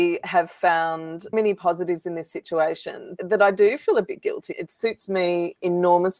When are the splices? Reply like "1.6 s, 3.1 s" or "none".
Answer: 1.3 s, 4.5 s